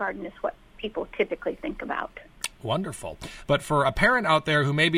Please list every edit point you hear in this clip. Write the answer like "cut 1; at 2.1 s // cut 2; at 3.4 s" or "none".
cut 1; at 3.4 s